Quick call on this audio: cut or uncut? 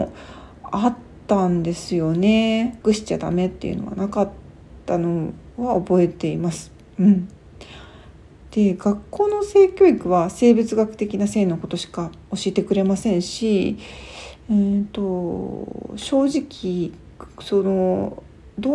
cut